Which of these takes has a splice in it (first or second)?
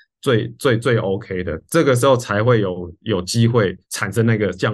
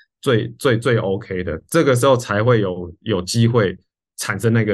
first